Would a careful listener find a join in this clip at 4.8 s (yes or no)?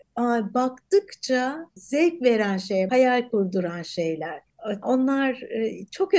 yes